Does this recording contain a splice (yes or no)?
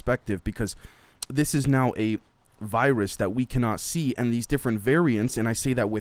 no